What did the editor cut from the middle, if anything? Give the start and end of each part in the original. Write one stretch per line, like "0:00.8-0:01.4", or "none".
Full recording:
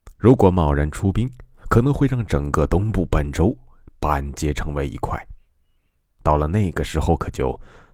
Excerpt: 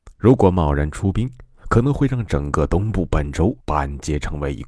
0:03.6-0:03.9